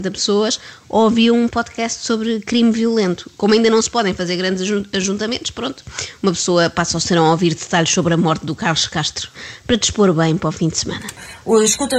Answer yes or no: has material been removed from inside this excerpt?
no